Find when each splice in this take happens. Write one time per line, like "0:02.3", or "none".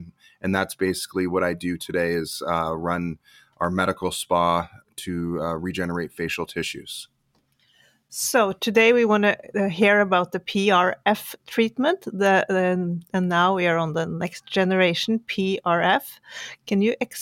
0:13.1